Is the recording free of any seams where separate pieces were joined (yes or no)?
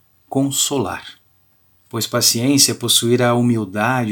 no